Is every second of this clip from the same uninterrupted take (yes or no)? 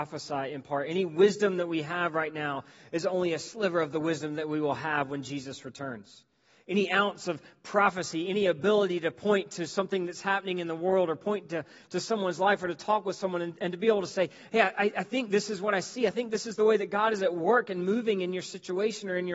yes